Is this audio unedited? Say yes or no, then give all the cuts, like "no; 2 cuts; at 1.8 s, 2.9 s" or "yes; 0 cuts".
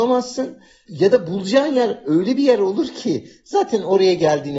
yes; 0 cuts